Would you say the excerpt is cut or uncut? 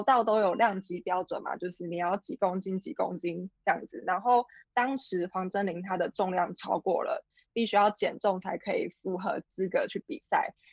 uncut